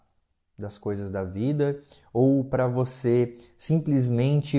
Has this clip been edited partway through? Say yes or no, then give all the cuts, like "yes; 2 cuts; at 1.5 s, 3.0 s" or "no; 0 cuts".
no; 0 cuts